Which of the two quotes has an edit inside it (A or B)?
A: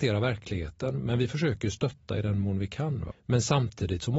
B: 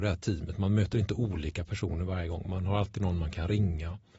A